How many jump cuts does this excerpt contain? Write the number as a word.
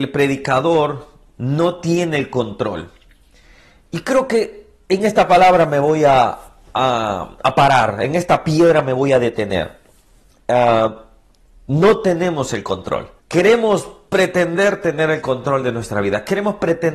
one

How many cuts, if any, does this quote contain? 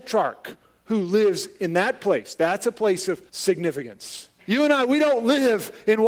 two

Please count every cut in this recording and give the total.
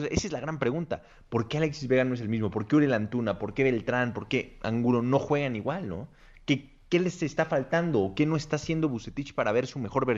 zero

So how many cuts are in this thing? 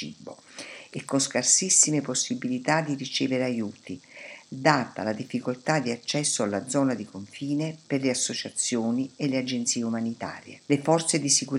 one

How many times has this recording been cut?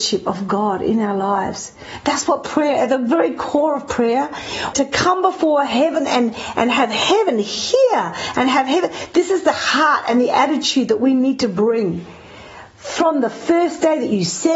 one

